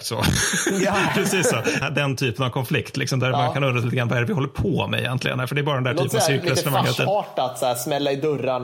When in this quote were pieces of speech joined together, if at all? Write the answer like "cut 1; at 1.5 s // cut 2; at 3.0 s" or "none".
cut 1; at 1.8 s